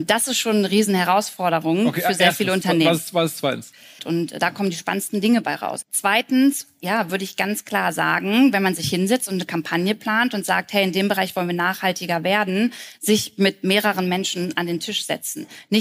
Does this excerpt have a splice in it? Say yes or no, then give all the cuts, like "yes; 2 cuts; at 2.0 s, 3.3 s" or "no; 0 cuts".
yes; 2 cuts; at 4.0 s, 5.8 s